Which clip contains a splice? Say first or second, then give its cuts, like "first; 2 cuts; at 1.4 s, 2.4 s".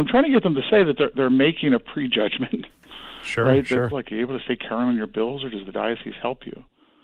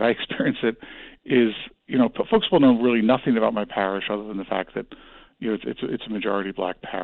first; 1 cut; at 3.9 s